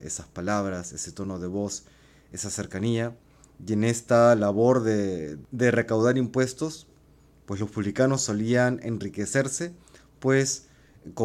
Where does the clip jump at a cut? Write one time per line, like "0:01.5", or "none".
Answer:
0:03.4